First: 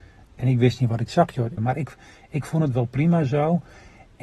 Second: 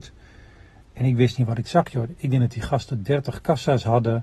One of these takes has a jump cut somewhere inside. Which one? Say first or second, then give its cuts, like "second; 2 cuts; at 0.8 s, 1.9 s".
first; 1 cut; at 1.6 s